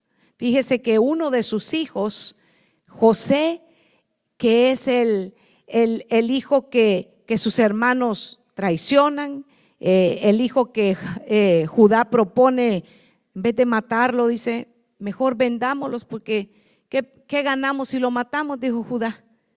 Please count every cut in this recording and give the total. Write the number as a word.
zero